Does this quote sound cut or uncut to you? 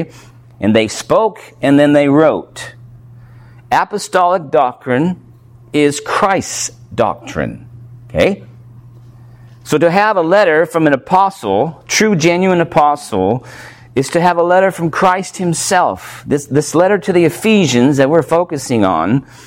uncut